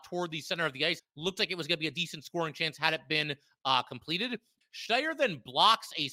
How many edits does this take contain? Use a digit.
2